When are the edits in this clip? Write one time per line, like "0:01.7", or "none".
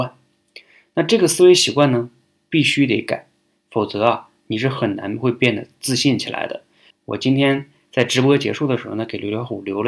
0:06.9